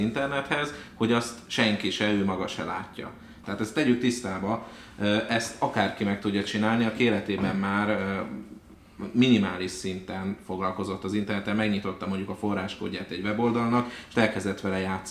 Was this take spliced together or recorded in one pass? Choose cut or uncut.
cut